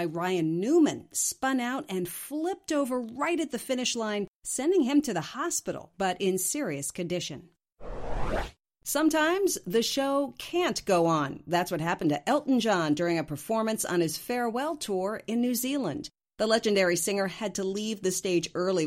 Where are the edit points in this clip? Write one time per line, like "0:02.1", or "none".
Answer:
0:05.9